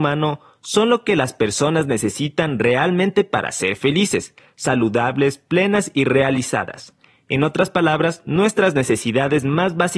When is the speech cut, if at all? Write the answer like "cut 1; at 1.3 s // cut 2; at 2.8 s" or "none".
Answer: none